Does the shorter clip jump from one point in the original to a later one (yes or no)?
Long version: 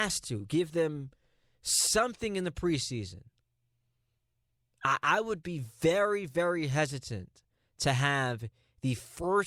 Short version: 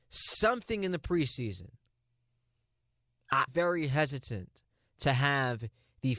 yes